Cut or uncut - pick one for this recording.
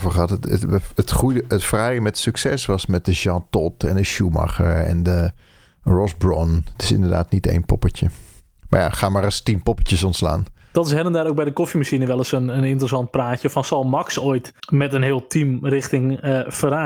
cut